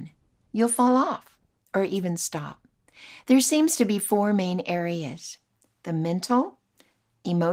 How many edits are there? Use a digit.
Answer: 0